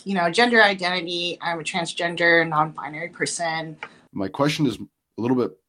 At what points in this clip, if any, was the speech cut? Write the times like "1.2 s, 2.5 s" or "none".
4.1 s